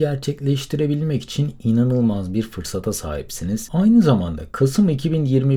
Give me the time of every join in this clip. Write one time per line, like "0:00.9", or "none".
0:03.7